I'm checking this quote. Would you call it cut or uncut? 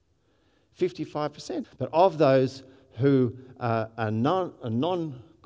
cut